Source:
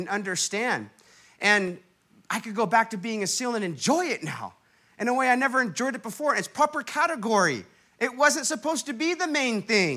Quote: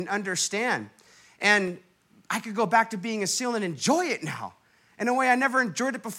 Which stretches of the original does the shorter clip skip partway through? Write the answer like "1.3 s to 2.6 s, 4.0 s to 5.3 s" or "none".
none